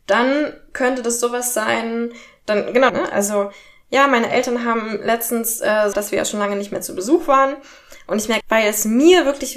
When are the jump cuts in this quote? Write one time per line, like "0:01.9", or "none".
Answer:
0:02.9
0:05.9
0:08.4